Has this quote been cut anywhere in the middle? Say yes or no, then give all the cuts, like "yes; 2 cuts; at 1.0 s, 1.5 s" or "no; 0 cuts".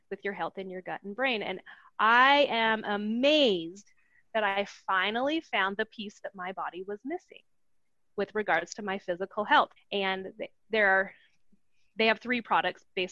yes; 1 cut; at 9.8 s